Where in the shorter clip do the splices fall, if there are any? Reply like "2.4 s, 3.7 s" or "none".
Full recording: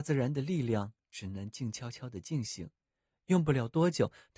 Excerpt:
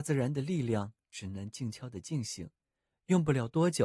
1.7 s

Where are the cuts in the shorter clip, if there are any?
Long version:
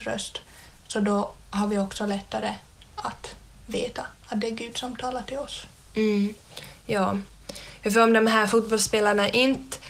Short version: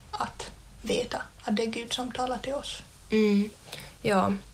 none

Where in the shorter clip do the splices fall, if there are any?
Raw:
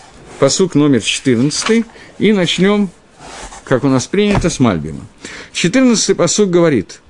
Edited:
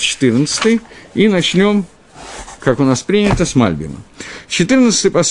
none

